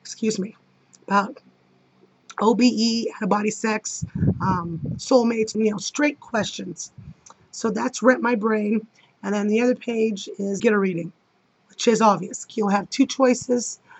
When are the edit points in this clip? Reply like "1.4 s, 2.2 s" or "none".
5.5 s, 10.6 s, 12.5 s